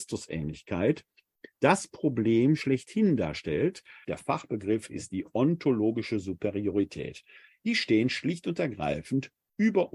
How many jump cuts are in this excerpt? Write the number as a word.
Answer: one